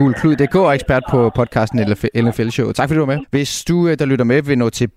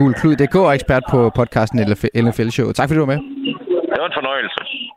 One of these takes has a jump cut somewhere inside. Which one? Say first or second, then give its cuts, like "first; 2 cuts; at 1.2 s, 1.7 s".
first; 1 cut; at 3.2 s